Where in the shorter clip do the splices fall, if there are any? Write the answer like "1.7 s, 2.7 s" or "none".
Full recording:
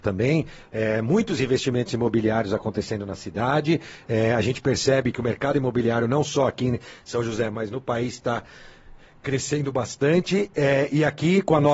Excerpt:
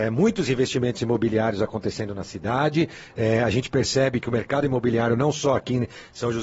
none